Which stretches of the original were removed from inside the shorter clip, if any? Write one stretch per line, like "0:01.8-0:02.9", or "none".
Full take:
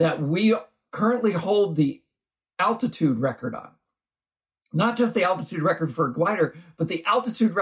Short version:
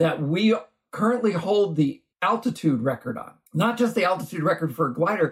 0:02.1-0:02.5
0:03.8-0:04.7